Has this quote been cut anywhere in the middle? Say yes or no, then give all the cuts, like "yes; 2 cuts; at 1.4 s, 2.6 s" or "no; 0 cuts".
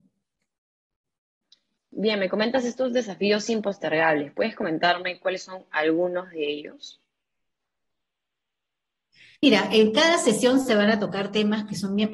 no; 0 cuts